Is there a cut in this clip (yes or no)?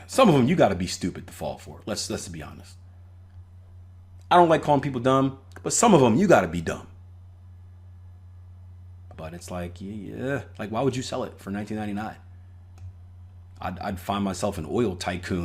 yes